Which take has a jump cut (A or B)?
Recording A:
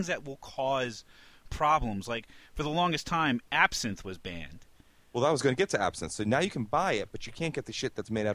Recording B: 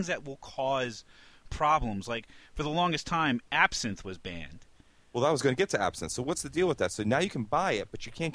A